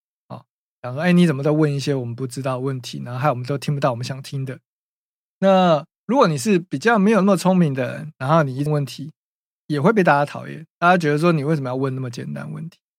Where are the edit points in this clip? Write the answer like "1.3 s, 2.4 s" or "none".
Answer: 8.7 s

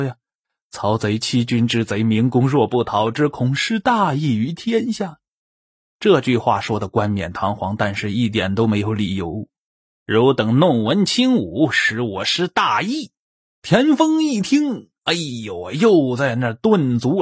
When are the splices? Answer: 9.9 s, 13.5 s

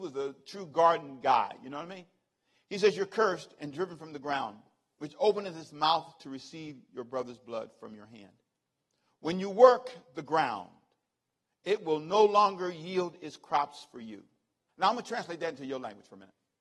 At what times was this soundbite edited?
14.7 s

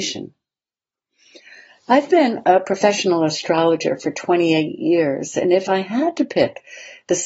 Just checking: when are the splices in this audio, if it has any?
none

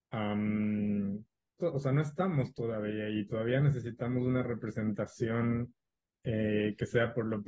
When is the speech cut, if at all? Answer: 1.6 s

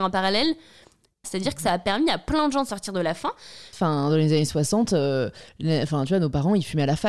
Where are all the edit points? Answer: 1.2 s, 3.7 s

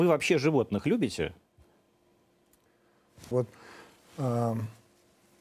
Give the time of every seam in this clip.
3.3 s

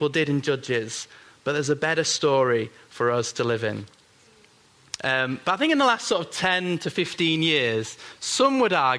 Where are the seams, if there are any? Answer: 5.0 s

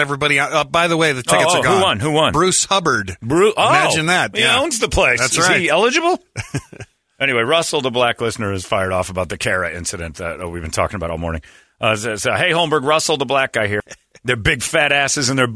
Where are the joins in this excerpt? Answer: 13.8 s

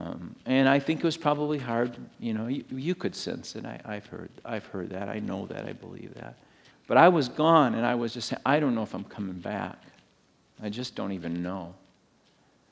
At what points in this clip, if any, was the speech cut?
6.7 s

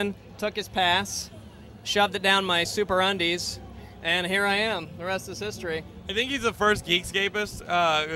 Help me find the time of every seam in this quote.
none

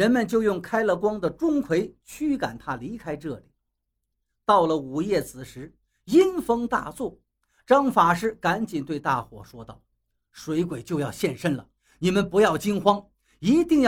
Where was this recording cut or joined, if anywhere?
none

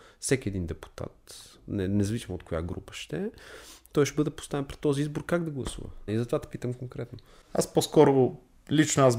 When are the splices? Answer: 6.1 s

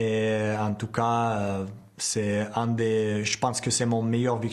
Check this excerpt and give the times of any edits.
none

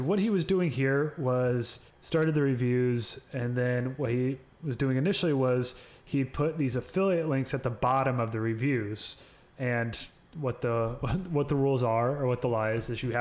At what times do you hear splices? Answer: 1.9 s, 9.6 s

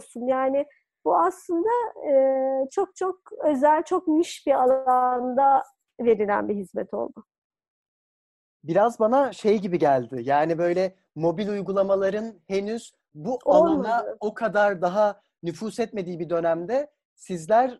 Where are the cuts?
none

